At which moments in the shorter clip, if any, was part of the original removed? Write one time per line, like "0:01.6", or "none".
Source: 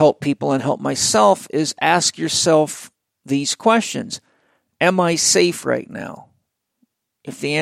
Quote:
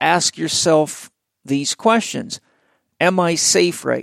none